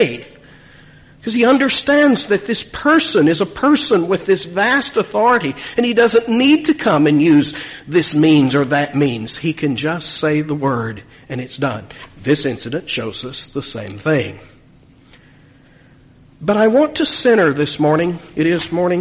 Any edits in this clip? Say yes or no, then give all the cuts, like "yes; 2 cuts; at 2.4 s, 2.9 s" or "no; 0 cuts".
no; 0 cuts